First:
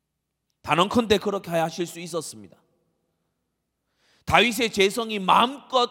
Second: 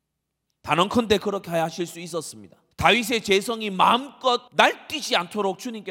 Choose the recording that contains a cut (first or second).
second